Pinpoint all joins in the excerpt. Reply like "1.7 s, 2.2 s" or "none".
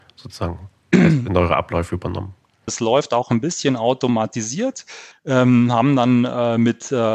2.7 s, 5.1 s